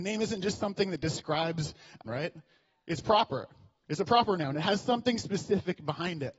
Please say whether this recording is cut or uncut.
cut